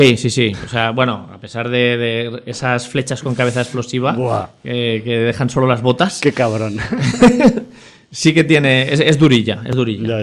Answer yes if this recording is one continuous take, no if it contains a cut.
yes